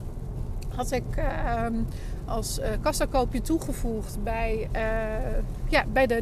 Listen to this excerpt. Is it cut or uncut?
cut